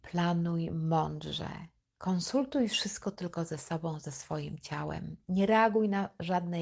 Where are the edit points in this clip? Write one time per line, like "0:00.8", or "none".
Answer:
none